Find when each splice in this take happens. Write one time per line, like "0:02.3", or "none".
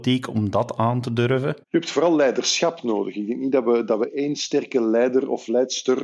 0:01.6